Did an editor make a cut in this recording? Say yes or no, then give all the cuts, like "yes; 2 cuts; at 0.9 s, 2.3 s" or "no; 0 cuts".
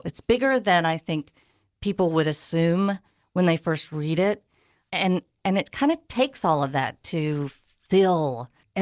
no; 0 cuts